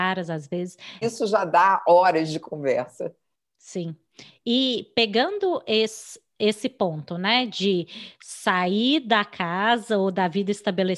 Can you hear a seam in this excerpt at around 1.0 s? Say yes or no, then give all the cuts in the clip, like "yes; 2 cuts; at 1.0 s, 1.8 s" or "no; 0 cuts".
yes; 1 cut; at 1.0 s